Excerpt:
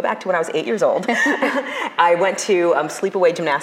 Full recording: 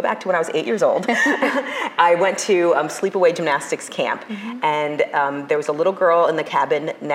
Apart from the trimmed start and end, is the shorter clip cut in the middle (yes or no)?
no